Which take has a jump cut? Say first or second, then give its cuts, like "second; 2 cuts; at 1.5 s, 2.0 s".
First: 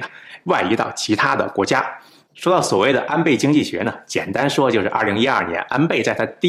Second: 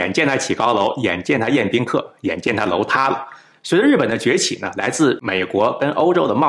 first; 1 cut; at 2.2 s